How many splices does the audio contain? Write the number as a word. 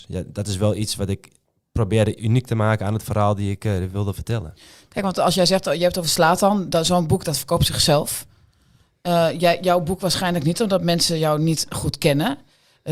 zero